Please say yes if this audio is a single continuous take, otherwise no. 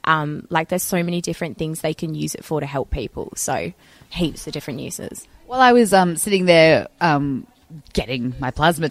yes